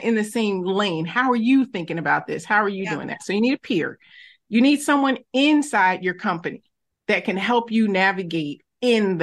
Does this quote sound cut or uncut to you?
uncut